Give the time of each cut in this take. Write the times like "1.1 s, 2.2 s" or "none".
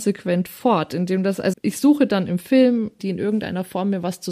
1.5 s, 3.0 s